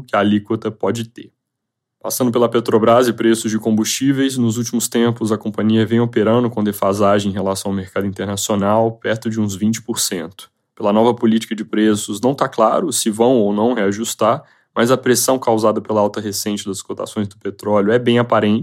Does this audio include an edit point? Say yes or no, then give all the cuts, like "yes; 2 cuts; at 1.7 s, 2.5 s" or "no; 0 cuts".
no; 0 cuts